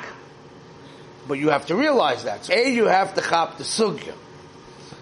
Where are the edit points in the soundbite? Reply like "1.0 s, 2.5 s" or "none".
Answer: 2.5 s